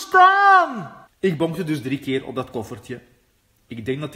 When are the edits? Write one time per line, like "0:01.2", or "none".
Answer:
0:01.1